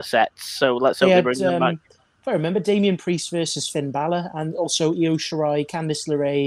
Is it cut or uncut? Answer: uncut